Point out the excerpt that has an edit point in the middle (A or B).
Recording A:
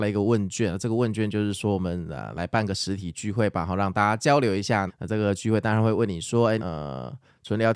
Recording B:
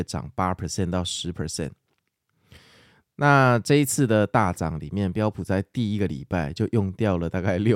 A